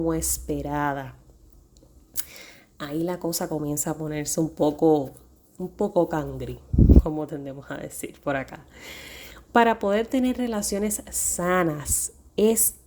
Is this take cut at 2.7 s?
no; 1 cut; at 9.4 s

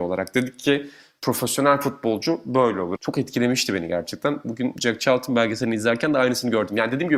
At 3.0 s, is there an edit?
yes; 1 cut; at 3.0 s

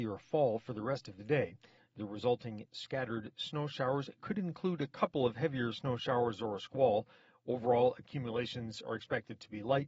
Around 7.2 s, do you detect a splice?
no; 1 cut; at 1.8 s

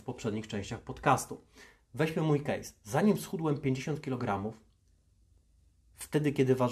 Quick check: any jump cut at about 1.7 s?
no; 0 cuts

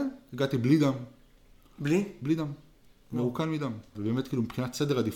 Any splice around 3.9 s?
yes; 1 cut; at 3.9 s

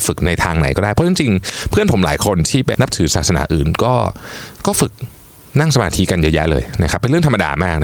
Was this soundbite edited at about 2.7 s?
yes; 1 cut; at 2.7 s

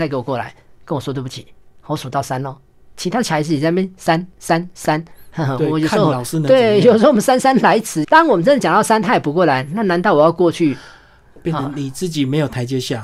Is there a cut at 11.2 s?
no; 2 cuts; at 2.9 s, 8.0 s

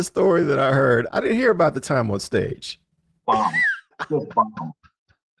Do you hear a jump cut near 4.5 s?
no; 2 cuts; at 1.1 s, 3.2 s

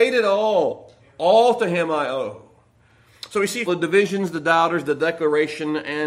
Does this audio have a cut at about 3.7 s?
yes; 1 cut; at 3.7 s

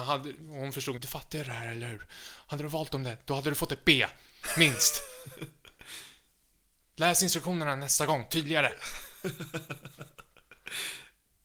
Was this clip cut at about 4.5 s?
no; 1 cut; at 1.0 s

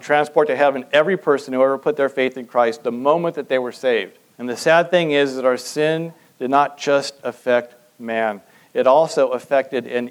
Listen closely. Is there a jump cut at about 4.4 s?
yes; 1 cut; at 4.4 s

